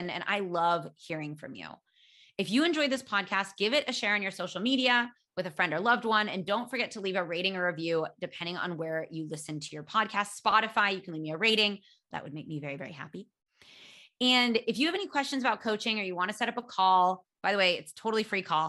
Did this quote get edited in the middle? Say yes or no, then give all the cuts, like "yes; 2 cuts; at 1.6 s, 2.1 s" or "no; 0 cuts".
yes; 1 cut; at 12.1 s